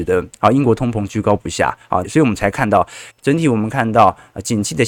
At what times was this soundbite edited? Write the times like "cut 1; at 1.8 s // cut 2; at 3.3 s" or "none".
cut 1; at 2.0 s // cut 2; at 3.1 s